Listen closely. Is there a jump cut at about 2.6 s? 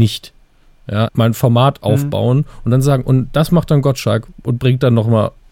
no; 1 cut; at 1.1 s

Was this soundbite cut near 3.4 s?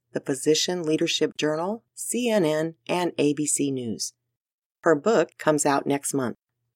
no; 2 cuts; at 1.9 s, 5.3 s

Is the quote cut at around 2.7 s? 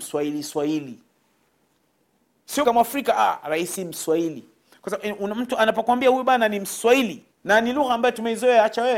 yes; 2 cuts; at 2.7 s, 7.3 s

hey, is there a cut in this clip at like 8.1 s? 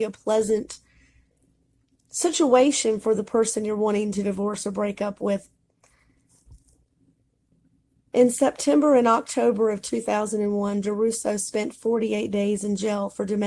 yes; 1 cut; at 8.1 s

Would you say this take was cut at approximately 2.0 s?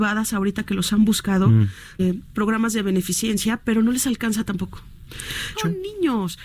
yes; 2 cuts; at 2.0 s, 5.5 s

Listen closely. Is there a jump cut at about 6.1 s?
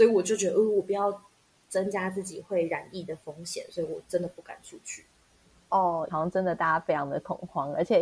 yes; 1 cut; at 6.1 s

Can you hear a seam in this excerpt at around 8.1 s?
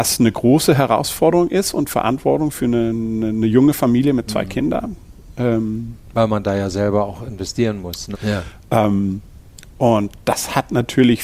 yes; 1 cut; at 8.1 s

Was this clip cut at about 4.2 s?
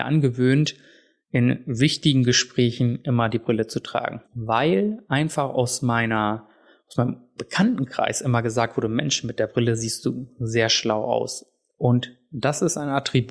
yes; 1 cut; at 4.2 s

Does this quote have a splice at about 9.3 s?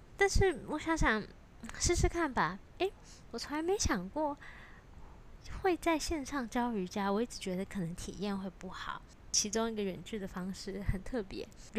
yes; 2 cuts; at 2.7 s, 9.3 s

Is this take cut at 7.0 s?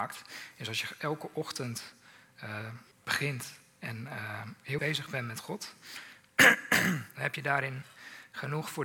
no; 2 cuts; at 2.9 s, 4.8 s

